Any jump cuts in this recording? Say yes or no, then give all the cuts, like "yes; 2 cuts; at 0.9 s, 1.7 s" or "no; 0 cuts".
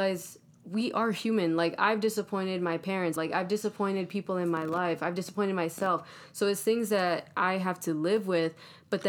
yes; 1 cut; at 3.2 s